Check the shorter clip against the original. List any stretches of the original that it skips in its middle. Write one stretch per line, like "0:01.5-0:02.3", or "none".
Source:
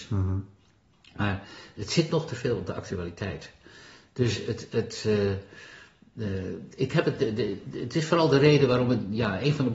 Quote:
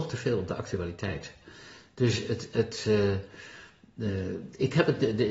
none